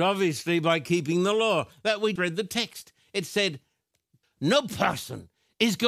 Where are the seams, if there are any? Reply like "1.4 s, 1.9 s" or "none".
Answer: 2.2 s, 4.2 s